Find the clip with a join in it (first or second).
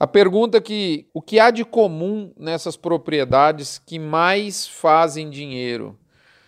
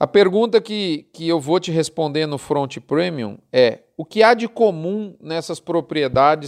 first